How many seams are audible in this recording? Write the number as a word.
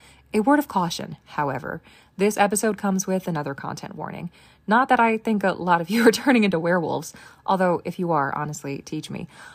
zero